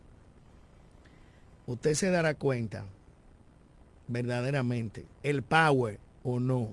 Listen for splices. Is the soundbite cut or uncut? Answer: cut